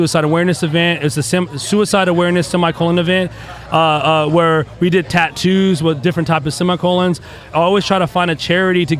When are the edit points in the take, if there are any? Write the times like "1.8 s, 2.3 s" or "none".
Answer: 7.5 s

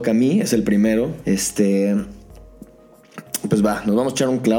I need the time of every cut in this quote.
1.2 s

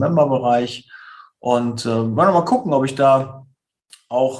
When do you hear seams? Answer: none

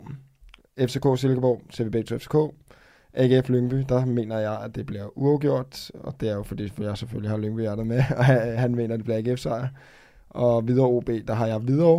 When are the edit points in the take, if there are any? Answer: none

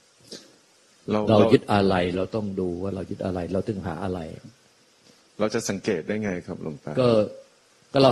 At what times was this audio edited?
none

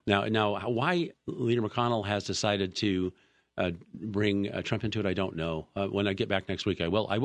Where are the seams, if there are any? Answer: 1.1 s

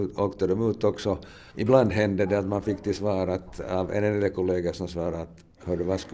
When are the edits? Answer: 1.5 s

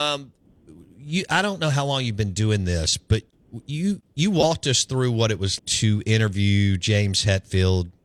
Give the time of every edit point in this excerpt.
5.6 s

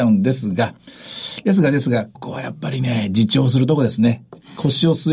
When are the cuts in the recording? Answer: 2.1 s

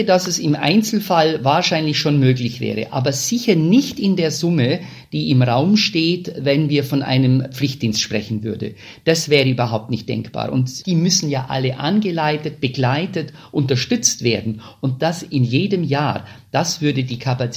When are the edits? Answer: none

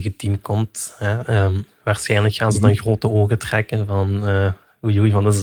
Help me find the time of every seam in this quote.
none

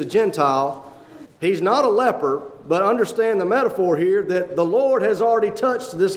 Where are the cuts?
1.3 s

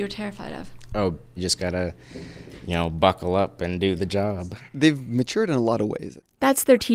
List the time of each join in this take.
1.4 s, 4.7 s

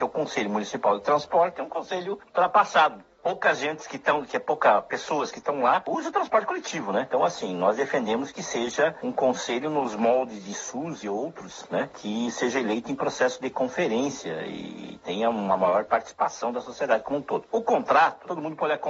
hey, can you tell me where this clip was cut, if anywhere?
none

